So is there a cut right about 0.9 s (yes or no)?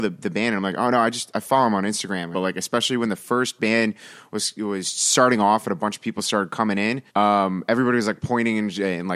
no